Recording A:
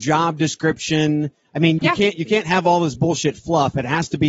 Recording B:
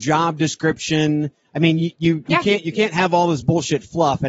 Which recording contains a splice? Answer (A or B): A